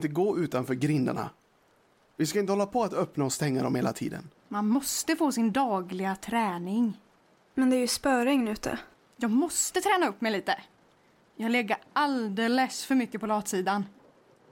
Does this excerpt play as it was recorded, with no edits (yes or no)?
no